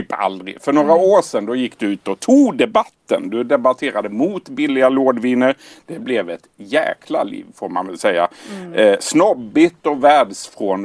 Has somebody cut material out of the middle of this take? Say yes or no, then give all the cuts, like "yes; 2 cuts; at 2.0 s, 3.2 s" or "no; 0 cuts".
no; 0 cuts